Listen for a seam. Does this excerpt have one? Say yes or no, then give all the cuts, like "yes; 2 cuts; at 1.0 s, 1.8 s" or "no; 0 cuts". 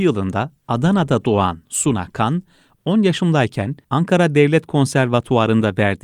yes; 1 cut; at 3.8 s